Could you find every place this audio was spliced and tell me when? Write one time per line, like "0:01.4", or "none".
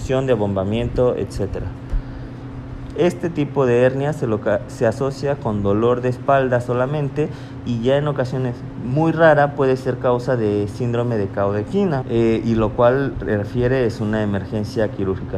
0:02.9
0:12.0